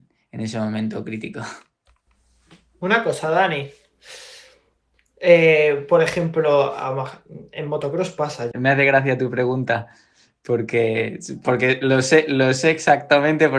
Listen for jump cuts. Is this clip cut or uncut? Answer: cut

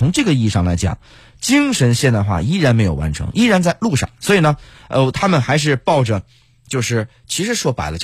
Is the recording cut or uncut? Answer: uncut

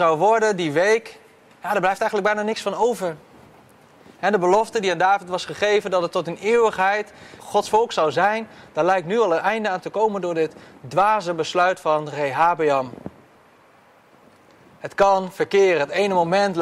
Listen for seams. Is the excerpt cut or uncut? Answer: cut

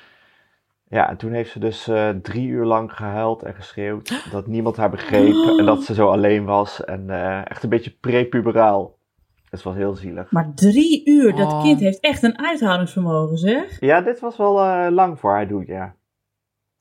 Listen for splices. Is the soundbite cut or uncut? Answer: uncut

